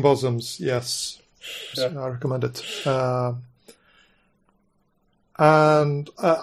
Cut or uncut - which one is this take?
cut